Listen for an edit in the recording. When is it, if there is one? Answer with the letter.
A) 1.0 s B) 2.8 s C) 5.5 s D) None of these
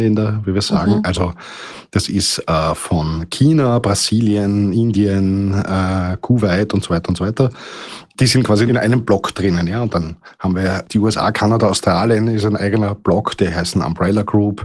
D